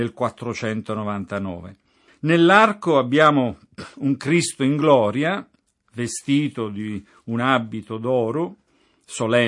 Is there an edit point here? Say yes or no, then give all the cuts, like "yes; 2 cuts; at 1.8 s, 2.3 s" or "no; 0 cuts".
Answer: yes; 1 cut; at 2.1 s